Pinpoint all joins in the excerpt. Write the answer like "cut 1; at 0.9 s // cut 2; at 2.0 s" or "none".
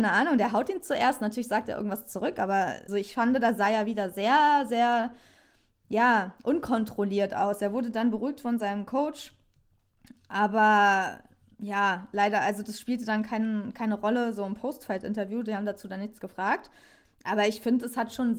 cut 1; at 2.9 s